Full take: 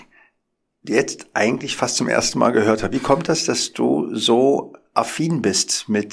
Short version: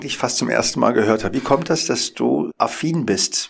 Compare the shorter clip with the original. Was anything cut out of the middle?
yes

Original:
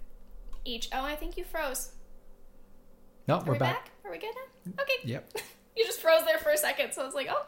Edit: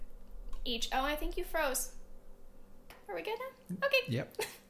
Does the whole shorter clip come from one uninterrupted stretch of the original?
no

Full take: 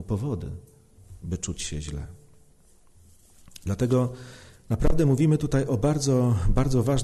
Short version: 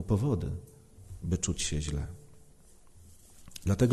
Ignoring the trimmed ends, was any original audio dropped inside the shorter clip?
no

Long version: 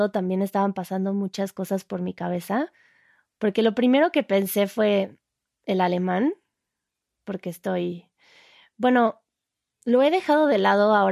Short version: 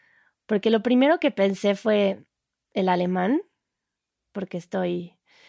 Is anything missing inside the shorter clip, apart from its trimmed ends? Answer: no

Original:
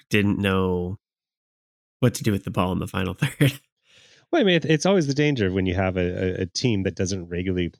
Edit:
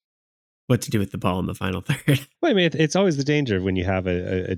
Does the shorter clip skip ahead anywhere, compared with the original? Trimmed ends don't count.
yes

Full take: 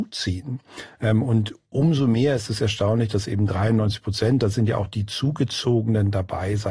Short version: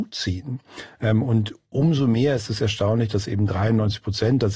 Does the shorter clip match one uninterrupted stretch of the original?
yes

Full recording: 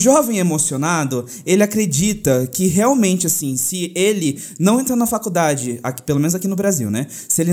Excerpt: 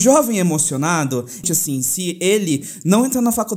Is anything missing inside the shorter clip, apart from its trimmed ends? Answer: yes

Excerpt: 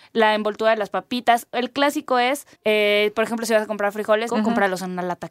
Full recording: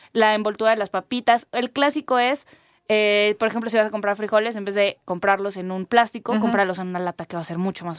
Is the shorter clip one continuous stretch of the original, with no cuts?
no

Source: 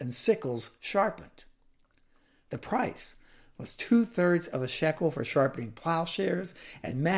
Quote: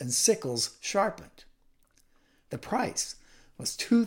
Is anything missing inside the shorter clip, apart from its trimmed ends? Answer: no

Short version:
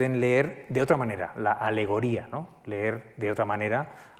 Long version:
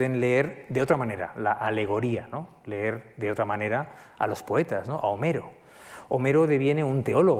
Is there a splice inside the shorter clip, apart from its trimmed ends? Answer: no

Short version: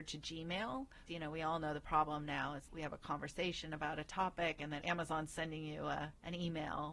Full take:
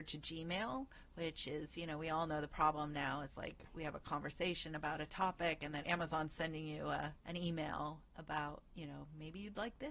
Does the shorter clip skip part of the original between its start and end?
yes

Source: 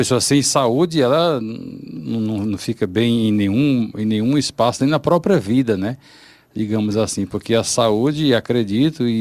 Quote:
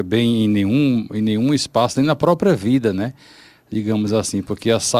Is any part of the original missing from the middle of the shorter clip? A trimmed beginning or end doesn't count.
no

